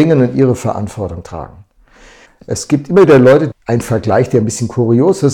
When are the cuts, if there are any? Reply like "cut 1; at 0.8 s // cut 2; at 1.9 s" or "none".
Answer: cut 1; at 2.2 s // cut 2; at 3.5 s